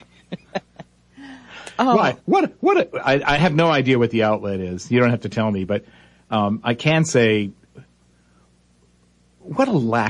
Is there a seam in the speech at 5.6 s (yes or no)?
no